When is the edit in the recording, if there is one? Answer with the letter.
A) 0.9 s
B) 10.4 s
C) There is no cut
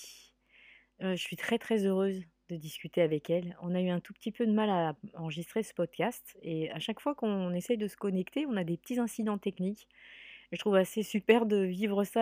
C